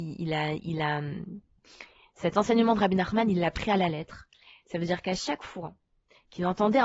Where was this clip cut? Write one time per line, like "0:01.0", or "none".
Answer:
none